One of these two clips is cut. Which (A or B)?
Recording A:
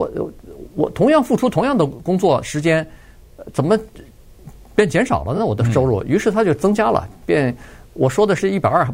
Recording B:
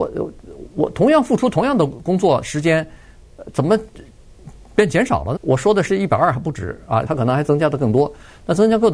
B